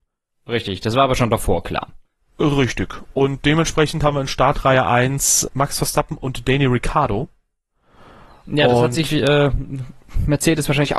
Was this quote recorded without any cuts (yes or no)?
no